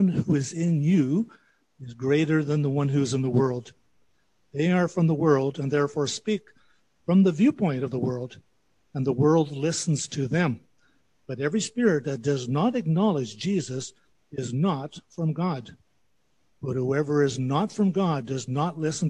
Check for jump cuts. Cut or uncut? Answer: cut